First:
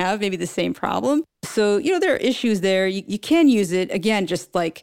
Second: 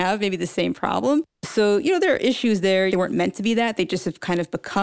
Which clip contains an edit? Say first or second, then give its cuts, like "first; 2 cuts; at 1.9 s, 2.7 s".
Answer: second; 1 cut; at 2.9 s